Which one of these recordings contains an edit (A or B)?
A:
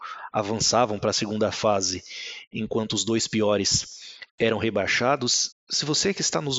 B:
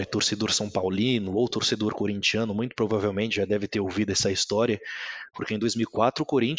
A